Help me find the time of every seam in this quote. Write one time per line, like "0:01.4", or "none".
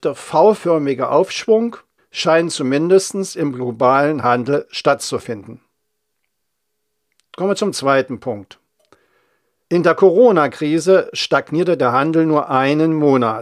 0:02.0
0:09.6

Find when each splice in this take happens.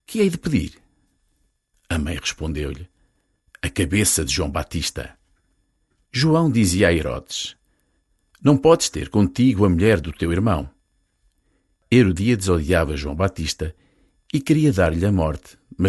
0:06.1

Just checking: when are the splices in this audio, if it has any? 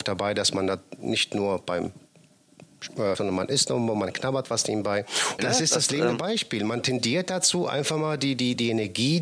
0:03.2
0:05.4

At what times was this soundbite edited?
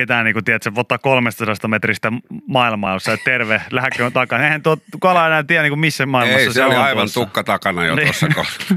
none

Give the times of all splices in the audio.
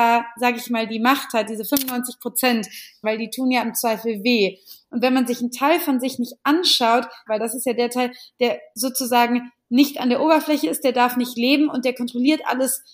0:03.0
0:07.3

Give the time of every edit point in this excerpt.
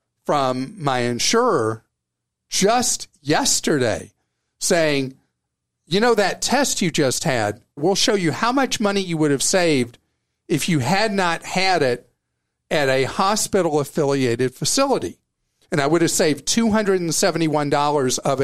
0:07.8

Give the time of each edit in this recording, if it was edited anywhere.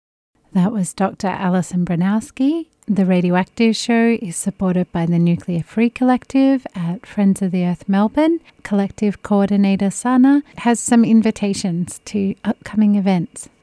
0:02.8

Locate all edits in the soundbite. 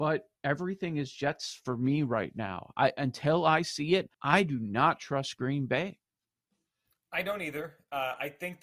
0:04.1

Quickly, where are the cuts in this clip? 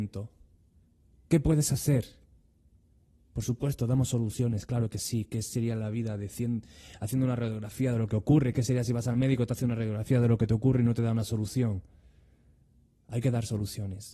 none

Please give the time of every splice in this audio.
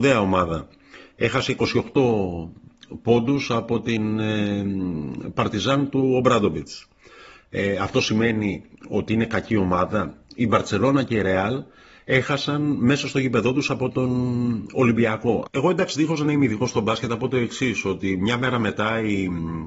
0:15.5

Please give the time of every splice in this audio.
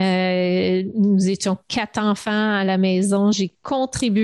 0:03.3

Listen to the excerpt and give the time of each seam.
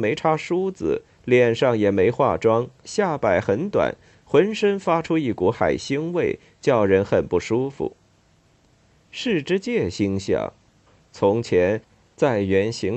0:02.8

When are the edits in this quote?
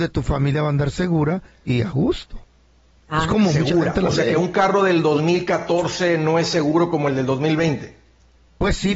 none

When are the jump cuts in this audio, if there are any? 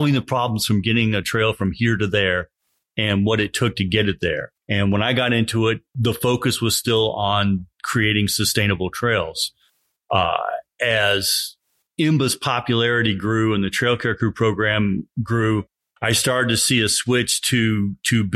0:04.5

